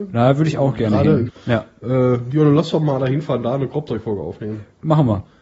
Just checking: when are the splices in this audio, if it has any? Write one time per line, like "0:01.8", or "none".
0:01.3

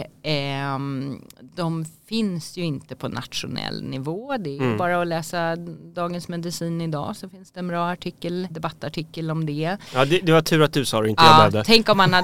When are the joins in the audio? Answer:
0:08.5
0:09.9

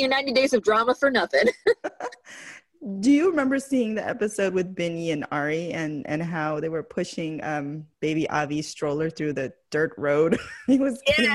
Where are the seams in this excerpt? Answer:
0:07.9

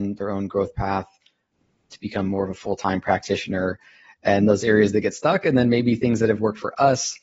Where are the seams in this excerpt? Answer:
none

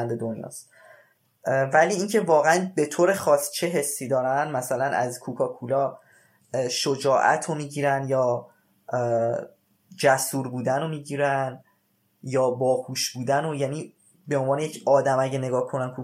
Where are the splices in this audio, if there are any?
none

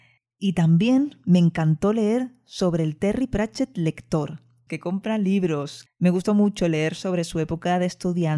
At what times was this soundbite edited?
0:04.7
0:05.9

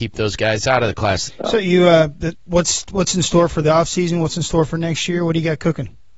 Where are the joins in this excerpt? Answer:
0:01.3
0:02.3

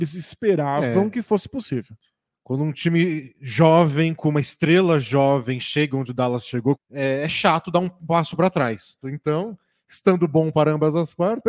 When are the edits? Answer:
0:06.7
0:09.0

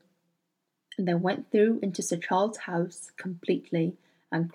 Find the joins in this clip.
none

